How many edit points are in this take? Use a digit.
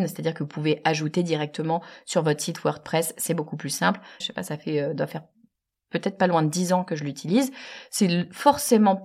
1